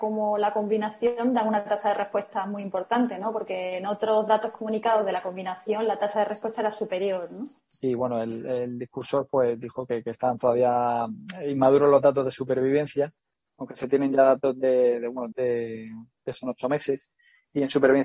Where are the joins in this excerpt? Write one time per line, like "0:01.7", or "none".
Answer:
0:07.7
0:15.3
0:16.3